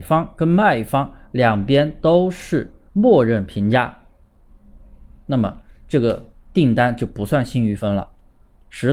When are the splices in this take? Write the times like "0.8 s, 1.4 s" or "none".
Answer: none